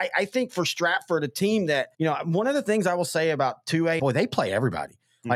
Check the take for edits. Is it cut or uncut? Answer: cut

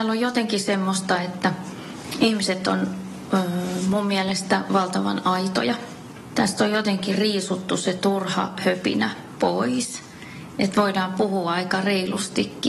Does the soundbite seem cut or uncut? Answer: uncut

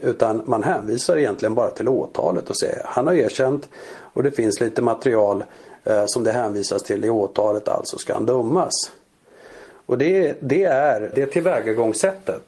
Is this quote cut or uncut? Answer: cut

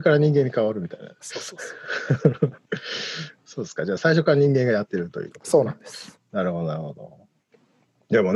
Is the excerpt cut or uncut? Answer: uncut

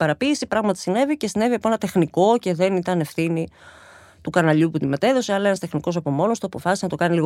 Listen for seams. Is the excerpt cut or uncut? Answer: uncut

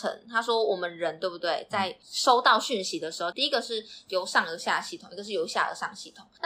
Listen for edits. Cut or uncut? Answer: cut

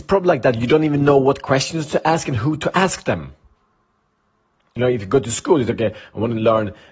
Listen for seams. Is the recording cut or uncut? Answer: uncut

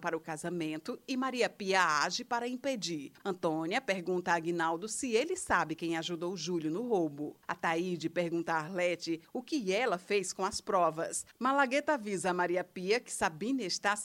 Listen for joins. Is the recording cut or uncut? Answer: cut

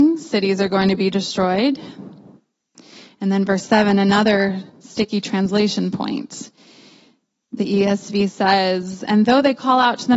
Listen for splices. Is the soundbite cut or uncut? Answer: uncut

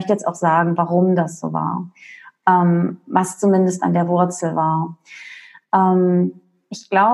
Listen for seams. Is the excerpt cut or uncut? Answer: uncut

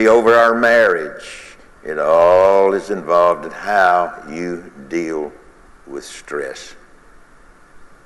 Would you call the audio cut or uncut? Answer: cut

